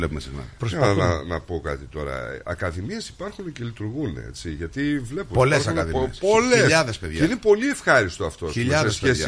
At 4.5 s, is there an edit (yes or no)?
no